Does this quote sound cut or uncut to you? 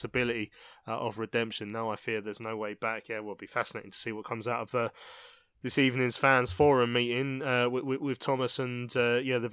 uncut